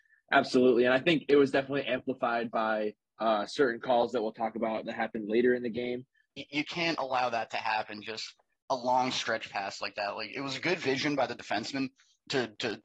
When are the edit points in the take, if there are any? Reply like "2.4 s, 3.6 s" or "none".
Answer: 6.4 s